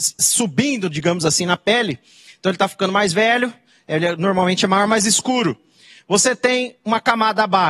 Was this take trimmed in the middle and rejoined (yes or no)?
no